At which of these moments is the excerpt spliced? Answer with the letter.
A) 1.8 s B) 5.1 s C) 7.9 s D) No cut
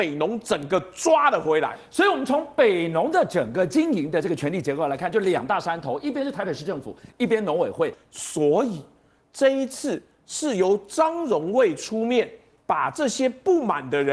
C